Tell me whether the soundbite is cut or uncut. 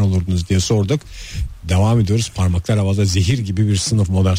uncut